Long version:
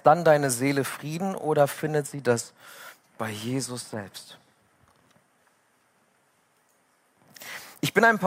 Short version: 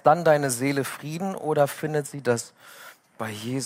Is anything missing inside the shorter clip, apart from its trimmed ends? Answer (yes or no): no